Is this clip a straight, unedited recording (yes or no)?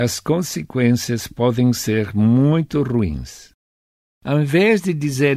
no